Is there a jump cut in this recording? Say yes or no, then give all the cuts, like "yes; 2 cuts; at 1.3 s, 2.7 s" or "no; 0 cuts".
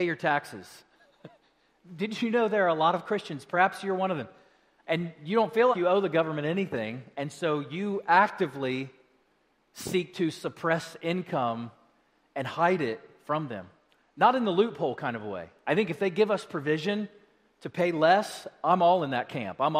yes; 1 cut; at 5.7 s